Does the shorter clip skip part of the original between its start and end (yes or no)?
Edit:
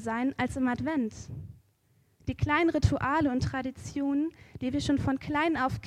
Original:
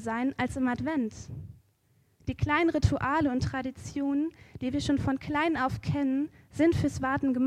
no